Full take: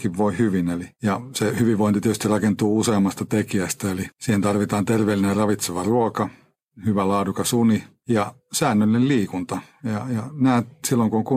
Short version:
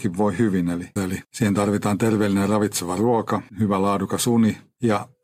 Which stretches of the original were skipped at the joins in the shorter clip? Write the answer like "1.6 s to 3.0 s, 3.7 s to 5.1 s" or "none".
1.0 s to 3.8 s, 6.4 s to 6.7 s